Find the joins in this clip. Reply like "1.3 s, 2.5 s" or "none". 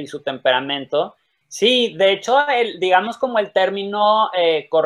1.4 s